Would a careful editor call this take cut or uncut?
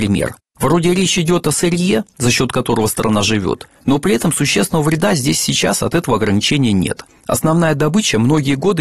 uncut